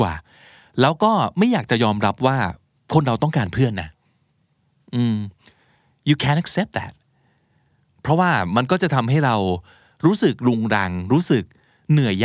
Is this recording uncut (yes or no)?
yes